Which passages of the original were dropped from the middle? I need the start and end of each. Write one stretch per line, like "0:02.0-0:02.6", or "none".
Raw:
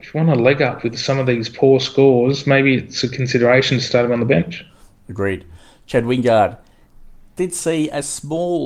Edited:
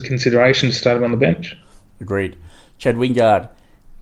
none